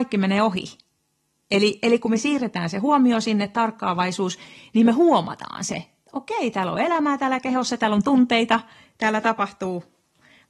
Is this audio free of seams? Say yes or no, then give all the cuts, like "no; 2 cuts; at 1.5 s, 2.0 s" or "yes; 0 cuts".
yes; 0 cuts